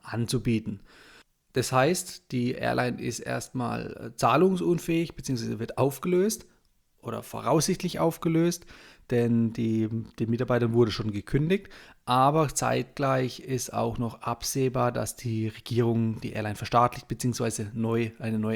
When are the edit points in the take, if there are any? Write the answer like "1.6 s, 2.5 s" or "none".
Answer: none